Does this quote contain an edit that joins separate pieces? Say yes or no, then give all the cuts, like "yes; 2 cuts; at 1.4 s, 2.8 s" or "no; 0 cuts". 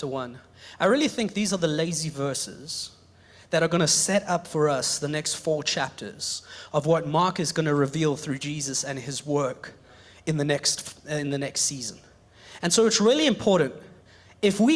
no; 0 cuts